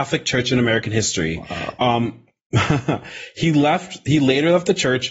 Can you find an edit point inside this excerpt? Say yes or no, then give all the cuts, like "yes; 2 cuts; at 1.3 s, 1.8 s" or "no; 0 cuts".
yes; 1 cut; at 1.8 s